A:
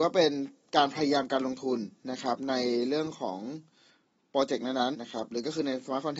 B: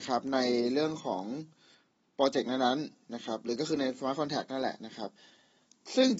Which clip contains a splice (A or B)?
A